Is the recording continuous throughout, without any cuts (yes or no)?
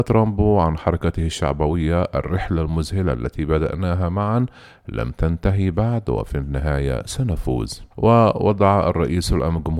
no